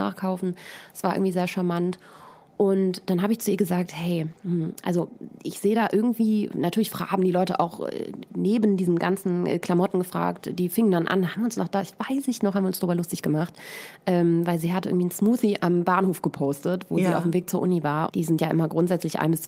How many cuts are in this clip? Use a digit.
1